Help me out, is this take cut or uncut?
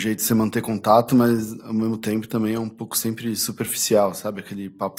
uncut